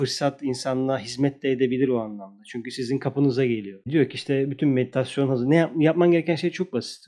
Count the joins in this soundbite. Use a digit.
0